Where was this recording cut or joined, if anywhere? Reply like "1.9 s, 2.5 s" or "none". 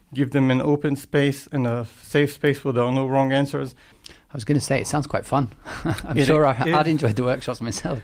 3.9 s